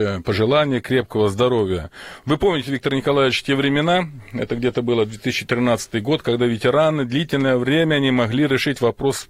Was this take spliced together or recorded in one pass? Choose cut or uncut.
uncut